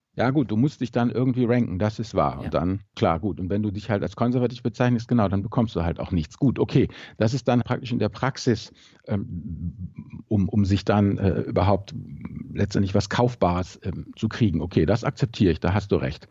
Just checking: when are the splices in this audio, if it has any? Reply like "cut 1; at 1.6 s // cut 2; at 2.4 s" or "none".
cut 1; at 7.6 s